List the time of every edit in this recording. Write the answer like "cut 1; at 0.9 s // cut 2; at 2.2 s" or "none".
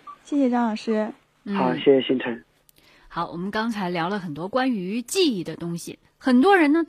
none